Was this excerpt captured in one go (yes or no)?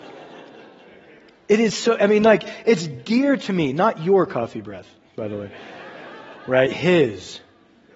yes